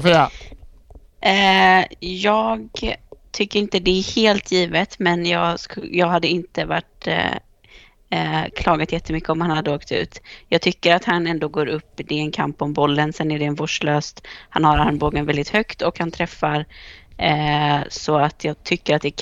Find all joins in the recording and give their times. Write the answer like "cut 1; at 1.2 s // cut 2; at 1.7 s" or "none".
none